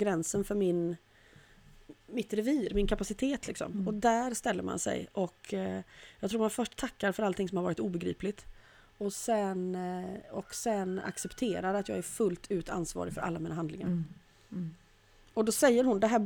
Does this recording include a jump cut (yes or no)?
no